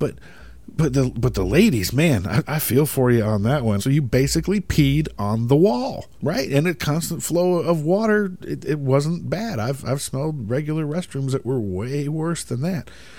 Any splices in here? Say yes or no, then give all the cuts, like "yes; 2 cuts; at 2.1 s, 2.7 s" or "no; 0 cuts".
yes; 3 cuts; at 2.4 s, 3.8 s, 6.2 s